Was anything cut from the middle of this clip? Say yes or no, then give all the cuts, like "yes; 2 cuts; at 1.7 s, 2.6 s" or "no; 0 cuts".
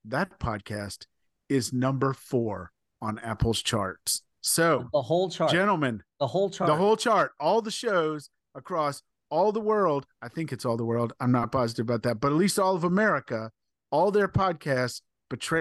no; 0 cuts